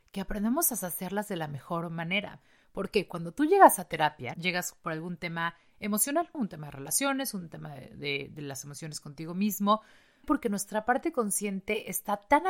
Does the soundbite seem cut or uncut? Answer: cut